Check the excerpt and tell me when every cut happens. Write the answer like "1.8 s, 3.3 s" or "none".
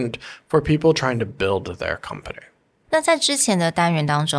none